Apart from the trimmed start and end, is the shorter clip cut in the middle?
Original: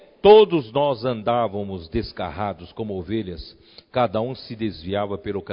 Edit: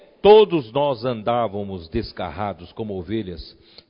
no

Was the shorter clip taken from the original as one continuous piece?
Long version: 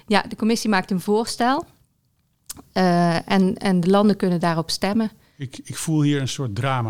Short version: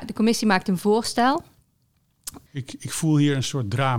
no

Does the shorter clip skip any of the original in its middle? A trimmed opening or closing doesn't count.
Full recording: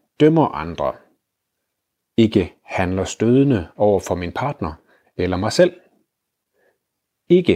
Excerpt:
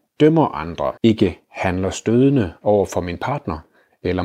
yes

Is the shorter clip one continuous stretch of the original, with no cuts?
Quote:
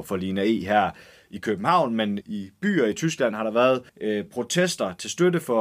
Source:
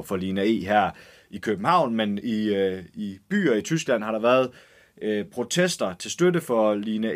no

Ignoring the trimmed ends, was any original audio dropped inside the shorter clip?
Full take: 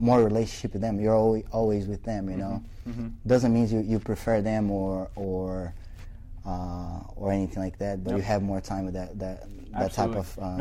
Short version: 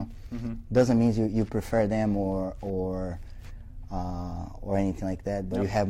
no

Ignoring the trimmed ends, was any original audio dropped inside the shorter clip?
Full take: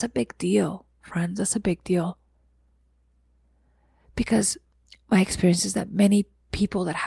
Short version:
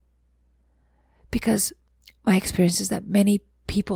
no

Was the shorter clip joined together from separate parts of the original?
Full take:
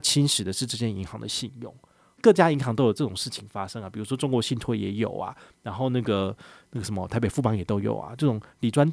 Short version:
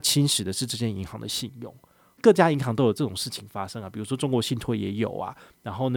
no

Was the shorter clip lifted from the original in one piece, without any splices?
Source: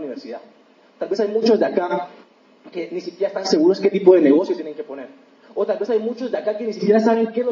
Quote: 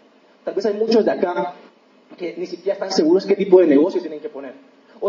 yes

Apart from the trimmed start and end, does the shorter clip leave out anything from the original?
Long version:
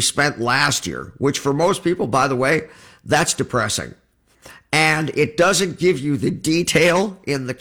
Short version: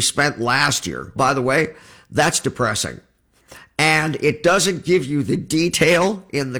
yes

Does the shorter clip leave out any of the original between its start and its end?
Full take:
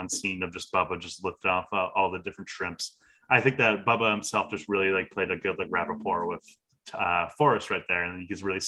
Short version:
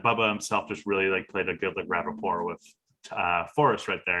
no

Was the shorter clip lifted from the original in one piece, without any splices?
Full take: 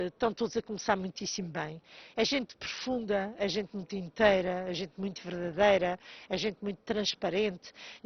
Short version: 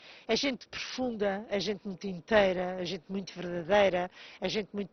yes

